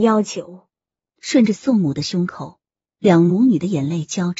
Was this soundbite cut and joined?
yes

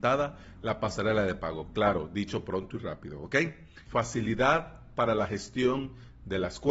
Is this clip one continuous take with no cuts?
no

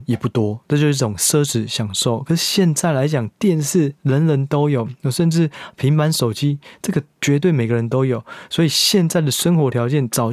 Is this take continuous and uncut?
yes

